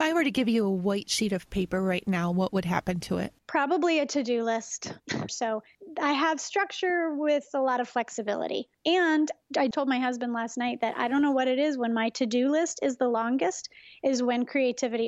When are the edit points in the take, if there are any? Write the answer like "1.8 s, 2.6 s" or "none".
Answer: 5.3 s, 9.7 s